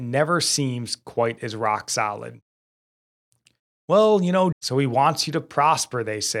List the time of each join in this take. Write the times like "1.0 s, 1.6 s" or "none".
4.5 s